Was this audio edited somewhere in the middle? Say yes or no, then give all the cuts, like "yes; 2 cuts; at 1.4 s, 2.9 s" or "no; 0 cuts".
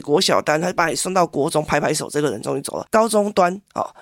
yes; 1 cut; at 2.9 s